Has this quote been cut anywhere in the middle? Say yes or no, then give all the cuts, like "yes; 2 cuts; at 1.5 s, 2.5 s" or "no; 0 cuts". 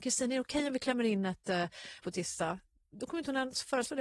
yes; 1 cut; at 2.0 s